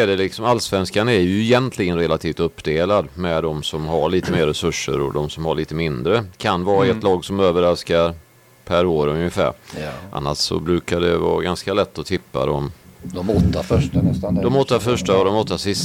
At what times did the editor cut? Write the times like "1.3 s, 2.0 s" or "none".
none